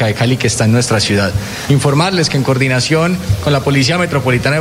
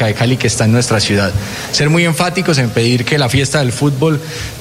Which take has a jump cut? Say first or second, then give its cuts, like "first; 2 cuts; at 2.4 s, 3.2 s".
first; 1 cut; at 1.7 s